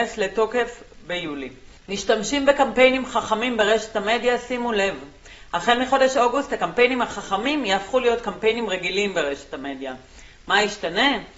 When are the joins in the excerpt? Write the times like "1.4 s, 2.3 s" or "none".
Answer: none

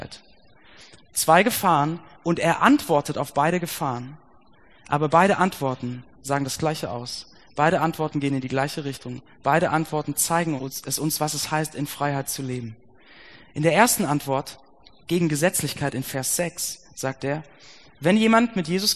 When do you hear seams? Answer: 10.6 s

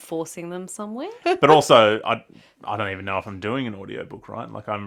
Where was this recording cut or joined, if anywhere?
1.2 s

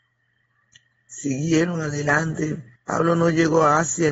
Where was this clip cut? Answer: none

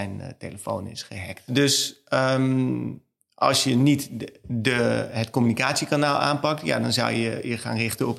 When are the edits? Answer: 1.5 s

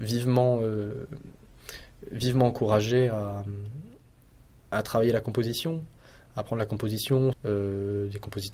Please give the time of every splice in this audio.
7.3 s

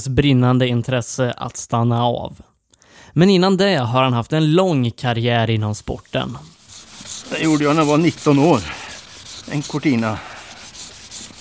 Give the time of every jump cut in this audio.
none

